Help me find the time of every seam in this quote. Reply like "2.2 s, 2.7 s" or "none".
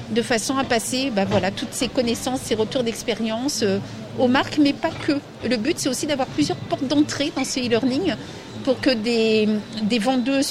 none